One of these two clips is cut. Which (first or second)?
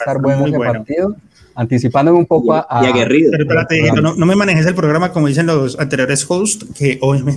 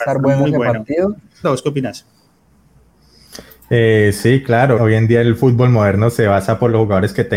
second